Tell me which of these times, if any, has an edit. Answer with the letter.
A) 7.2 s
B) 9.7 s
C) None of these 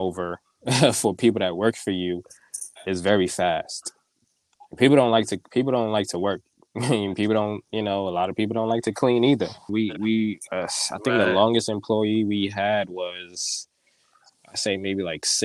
B